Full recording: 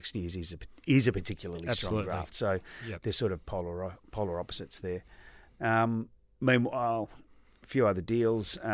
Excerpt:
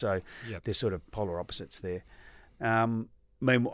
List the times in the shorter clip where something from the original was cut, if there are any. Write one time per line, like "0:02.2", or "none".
0:01.1